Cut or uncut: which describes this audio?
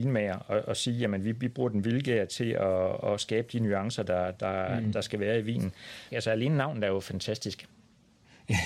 cut